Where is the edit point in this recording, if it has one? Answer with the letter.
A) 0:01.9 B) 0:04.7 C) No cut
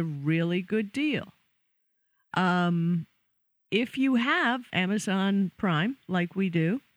B